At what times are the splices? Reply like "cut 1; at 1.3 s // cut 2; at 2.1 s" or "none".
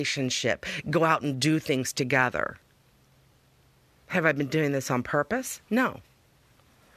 none